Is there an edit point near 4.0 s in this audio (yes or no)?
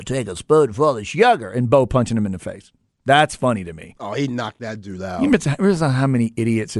no